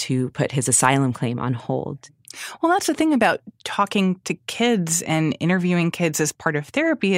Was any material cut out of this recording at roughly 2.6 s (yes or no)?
no